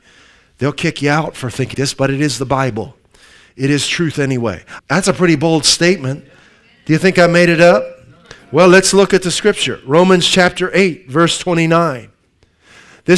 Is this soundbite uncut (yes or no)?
no